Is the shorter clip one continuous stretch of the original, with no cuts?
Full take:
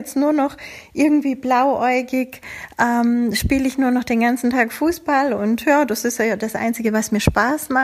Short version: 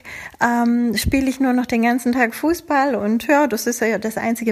yes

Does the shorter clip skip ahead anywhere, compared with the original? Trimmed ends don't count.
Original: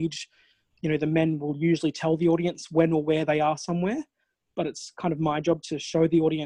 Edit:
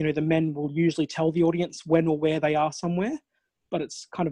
no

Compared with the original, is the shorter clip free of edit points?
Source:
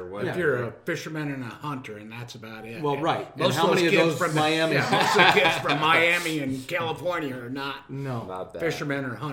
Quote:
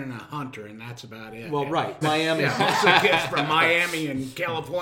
no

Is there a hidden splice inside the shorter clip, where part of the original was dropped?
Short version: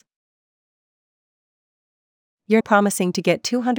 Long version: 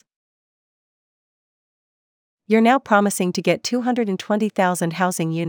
yes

